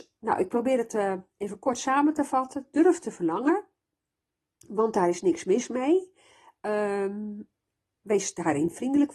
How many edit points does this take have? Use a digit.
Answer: 0